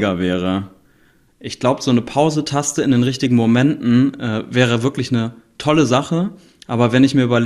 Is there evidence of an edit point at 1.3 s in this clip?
yes; 1 cut; at 1.3 s

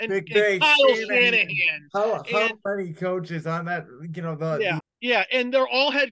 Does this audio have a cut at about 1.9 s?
no; 1 cut; at 4.8 s

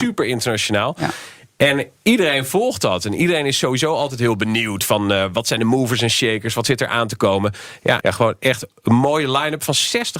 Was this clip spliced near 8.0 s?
yes; 1 cut; at 8.0 s

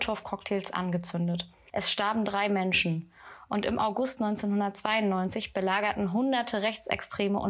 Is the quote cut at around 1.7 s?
yes; 1 cut; at 1.7 s

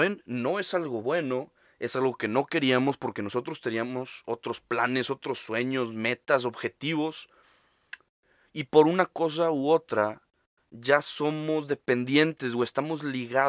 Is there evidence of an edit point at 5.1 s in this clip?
no; 0 cuts

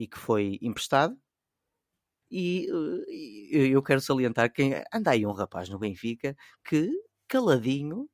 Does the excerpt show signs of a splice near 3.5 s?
no; 1 cut; at 2.2 s

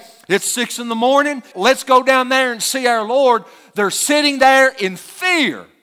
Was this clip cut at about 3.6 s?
no; 1 cut; at 1.5 s

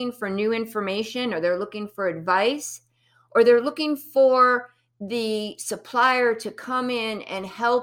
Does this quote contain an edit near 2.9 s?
no; 0 cuts

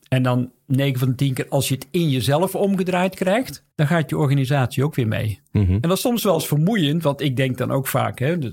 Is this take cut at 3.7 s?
yes; 1 cut; at 3.7 s

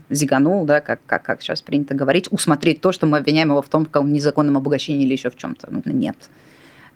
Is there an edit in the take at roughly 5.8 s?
yes; 1 cut; at 5.8 s

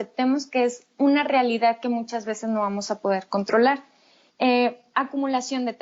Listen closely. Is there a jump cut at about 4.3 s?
yes; 1 cut; at 4.3 s

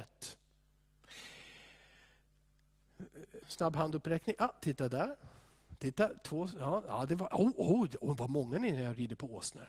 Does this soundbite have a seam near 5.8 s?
no; 1 cut; at 3.4 s

